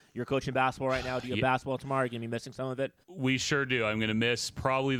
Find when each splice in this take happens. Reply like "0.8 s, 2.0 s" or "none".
3.0 s